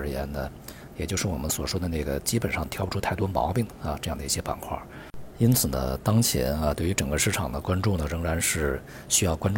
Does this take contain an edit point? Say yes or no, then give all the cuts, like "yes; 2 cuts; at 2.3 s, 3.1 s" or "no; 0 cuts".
yes; 1 cut; at 5.3 s